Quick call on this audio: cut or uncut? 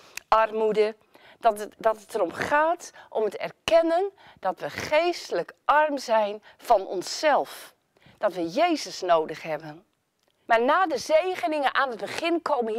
cut